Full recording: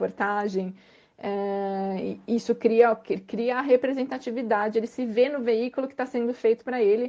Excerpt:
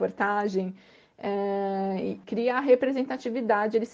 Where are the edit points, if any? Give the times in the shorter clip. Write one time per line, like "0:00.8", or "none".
0:02.2